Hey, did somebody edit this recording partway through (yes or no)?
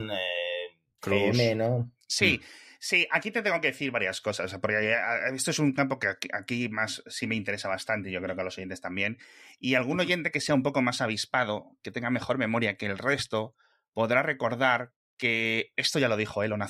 yes